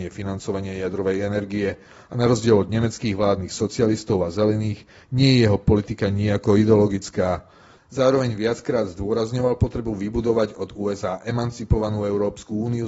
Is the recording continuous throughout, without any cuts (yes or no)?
no